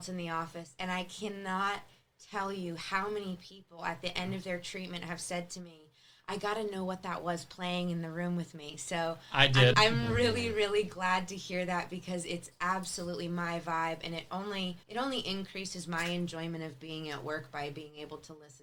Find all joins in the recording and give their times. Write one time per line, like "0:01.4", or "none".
0:09.7
0:14.8